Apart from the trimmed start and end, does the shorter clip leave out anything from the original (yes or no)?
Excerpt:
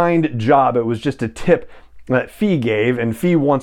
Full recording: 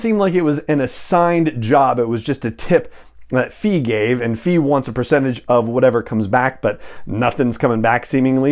no